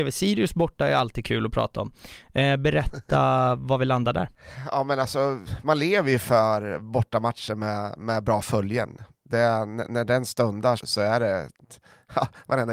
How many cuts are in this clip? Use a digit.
2